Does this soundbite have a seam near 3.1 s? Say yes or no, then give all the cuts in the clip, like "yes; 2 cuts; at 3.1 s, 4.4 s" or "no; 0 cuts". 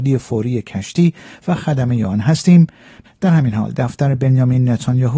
yes; 1 cut; at 3.1 s